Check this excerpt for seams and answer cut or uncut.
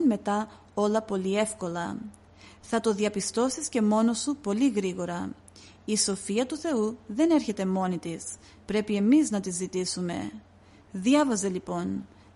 uncut